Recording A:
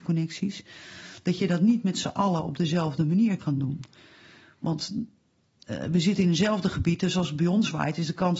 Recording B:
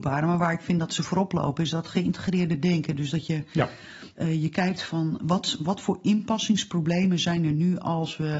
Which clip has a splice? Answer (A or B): B